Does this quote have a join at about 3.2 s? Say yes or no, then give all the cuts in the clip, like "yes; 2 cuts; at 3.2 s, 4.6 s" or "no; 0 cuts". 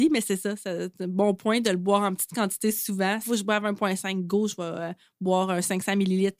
yes; 1 cut; at 3.2 s